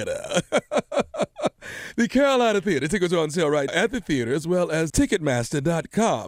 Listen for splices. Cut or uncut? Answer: cut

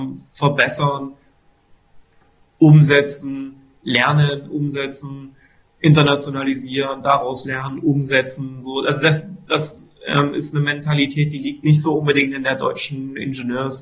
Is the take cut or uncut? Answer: uncut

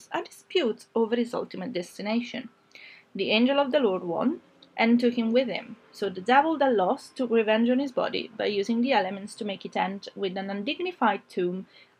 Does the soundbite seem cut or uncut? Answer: uncut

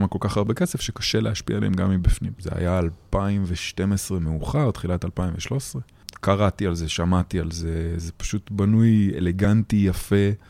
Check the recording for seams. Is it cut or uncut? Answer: cut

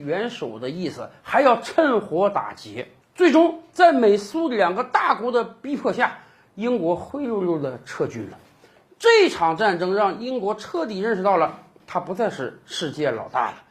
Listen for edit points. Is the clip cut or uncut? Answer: uncut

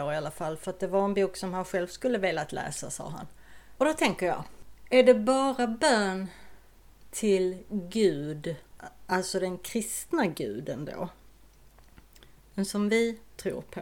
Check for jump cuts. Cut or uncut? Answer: cut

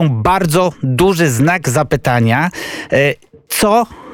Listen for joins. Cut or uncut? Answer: uncut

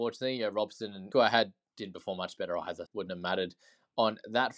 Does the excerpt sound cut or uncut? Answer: cut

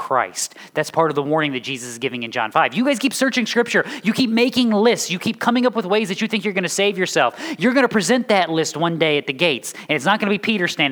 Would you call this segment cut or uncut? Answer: uncut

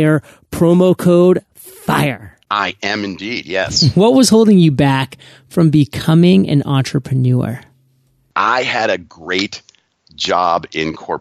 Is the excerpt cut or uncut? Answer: cut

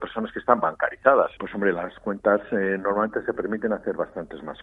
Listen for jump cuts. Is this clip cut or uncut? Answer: cut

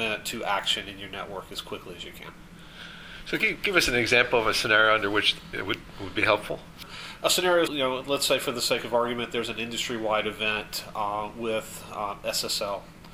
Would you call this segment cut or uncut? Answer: cut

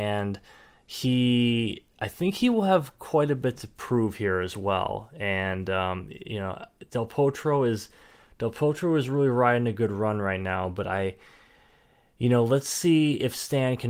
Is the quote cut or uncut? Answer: uncut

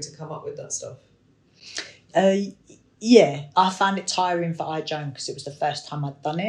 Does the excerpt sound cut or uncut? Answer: uncut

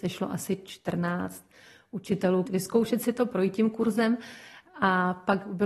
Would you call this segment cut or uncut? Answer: cut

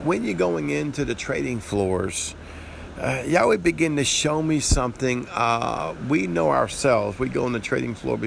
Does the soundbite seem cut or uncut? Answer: uncut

